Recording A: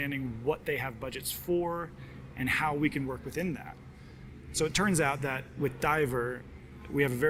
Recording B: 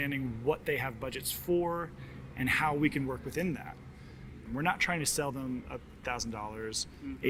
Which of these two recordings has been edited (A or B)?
B